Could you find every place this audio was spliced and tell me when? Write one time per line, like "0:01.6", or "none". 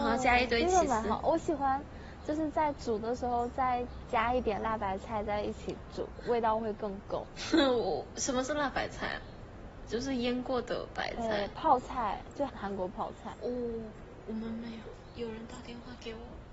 0:12.5

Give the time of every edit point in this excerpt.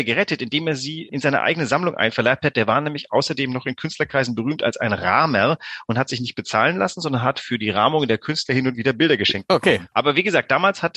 0:01.1
0:09.9

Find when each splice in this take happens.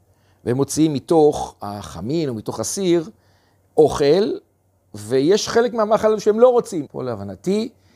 0:06.9

